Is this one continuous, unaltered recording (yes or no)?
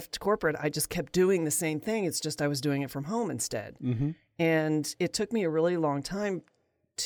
yes